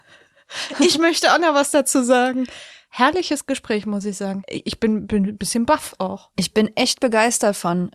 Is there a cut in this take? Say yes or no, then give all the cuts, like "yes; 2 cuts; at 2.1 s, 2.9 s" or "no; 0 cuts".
no; 0 cuts